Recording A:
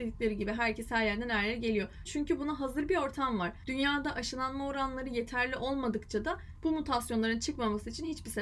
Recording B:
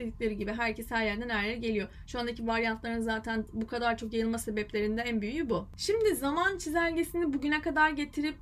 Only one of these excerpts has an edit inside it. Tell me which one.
A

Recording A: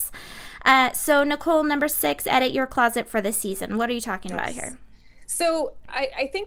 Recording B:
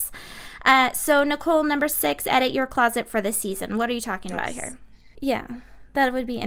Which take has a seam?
B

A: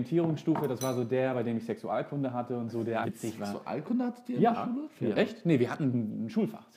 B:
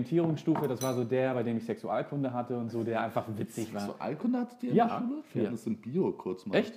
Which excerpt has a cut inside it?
A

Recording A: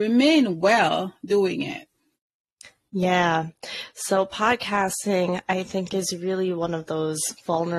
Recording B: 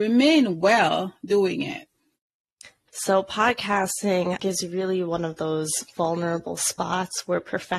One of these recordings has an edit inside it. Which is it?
B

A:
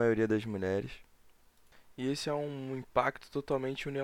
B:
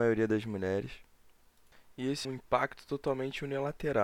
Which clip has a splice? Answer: B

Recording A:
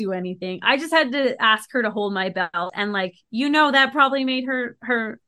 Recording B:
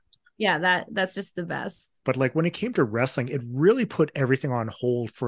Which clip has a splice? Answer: B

